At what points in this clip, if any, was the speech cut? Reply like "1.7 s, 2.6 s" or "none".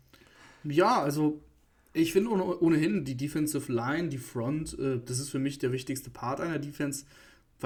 none